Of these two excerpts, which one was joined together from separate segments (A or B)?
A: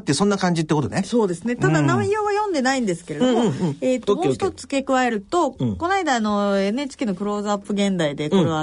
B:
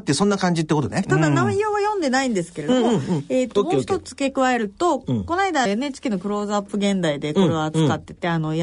B